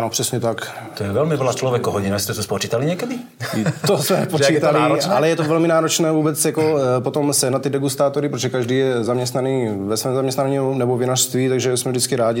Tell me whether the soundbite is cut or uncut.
uncut